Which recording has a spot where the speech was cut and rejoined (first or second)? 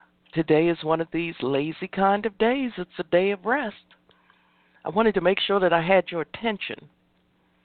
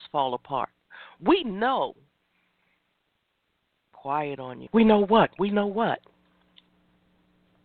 second